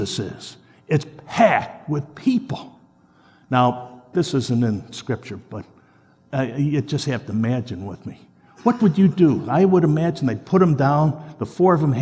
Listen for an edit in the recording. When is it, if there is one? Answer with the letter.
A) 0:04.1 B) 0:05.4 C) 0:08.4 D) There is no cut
A